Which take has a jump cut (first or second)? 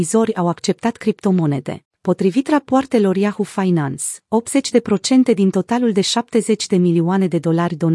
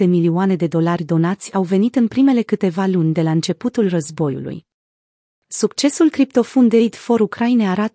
first